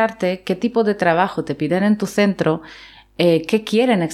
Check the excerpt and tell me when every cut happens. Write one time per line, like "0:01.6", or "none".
none